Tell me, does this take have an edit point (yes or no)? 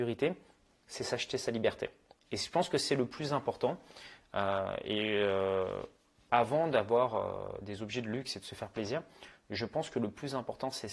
no